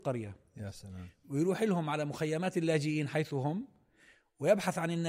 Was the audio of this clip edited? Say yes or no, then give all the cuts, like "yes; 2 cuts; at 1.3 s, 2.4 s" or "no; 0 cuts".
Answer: no; 0 cuts